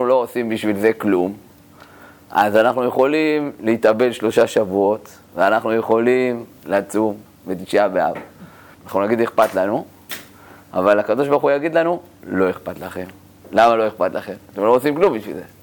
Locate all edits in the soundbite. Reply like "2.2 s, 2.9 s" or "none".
8.7 s